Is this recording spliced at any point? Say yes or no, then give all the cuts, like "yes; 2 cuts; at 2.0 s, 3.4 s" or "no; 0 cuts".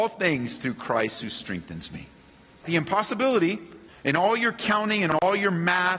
yes; 2 cuts; at 2.6 s, 3.9 s